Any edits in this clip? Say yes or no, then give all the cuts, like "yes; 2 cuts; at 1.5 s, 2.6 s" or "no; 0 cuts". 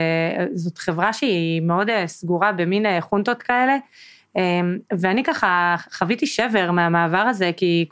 no; 0 cuts